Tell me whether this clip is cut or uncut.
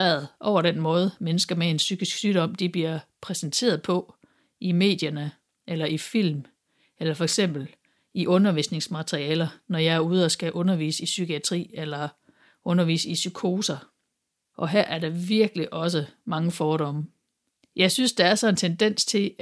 cut